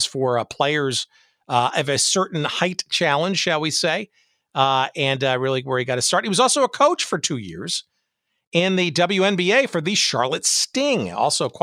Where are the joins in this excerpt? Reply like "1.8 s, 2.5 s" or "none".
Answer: none